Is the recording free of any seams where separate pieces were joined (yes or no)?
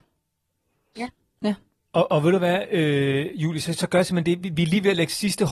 no